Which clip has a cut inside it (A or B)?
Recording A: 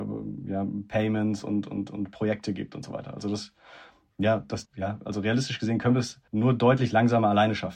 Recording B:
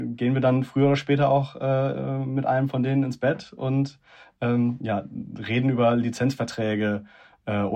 A